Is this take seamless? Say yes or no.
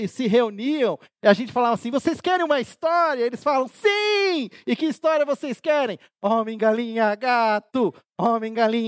yes